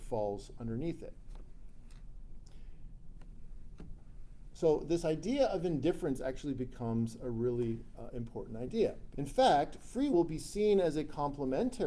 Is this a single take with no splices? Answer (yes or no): no